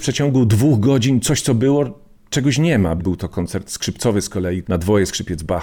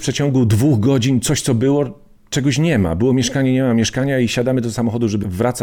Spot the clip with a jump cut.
first; 2 cuts; at 3.0 s, 4.6 s

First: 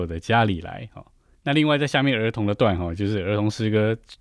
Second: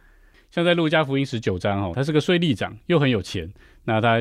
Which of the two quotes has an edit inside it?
second; 1 cut; at 1.9 s

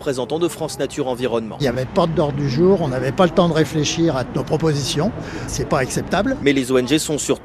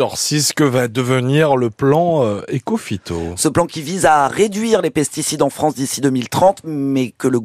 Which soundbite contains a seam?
first; 1 cut; at 5.5 s

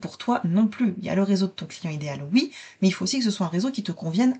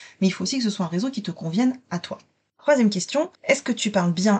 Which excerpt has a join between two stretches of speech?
second; 1 cut; at 3.3 s

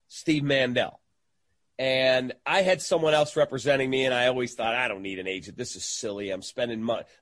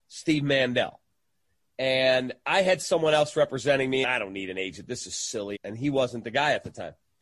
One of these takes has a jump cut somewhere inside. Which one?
second; 2 cuts; at 4.0 s, 5.6 s

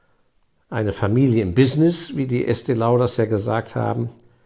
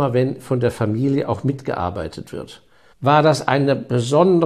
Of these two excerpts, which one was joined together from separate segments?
second; 1 cut; at 2.9 s

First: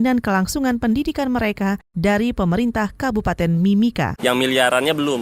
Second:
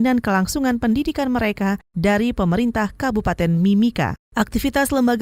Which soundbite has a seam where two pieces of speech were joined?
first; 1 cut; at 4.2 s

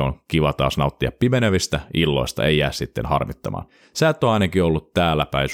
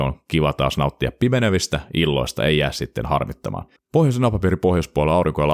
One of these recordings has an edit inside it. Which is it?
second; 1 cut; at 3.8 s

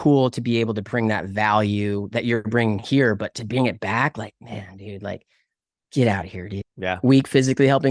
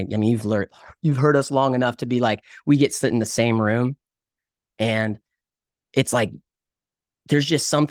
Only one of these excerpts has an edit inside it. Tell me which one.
first; 1 cut; at 6.6 s

